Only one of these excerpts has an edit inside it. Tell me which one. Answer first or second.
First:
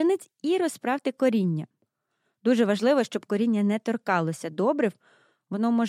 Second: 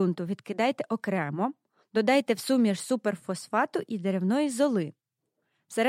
second